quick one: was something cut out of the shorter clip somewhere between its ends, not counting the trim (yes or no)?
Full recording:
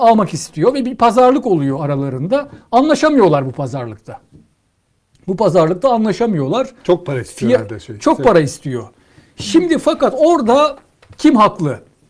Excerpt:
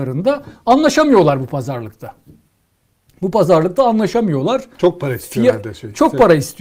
no